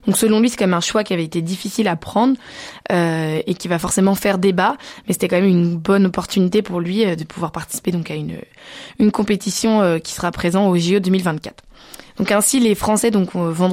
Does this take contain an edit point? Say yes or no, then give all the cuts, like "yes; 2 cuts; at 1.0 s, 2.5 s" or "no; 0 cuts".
no; 0 cuts